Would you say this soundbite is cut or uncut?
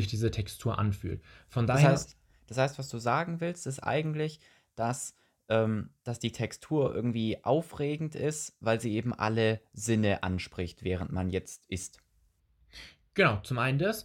uncut